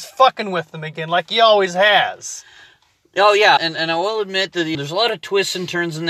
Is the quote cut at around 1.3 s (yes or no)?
no